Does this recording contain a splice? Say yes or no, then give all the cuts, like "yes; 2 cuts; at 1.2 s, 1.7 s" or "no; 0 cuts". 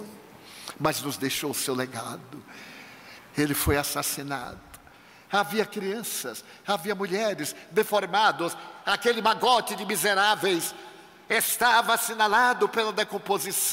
yes; 1 cut; at 3.2 s